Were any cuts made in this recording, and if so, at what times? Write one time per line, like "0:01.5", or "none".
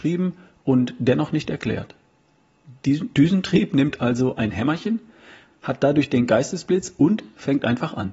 0:05.5